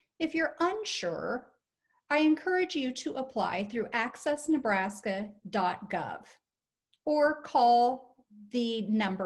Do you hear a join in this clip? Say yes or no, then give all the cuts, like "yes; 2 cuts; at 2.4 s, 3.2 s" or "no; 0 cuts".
no; 0 cuts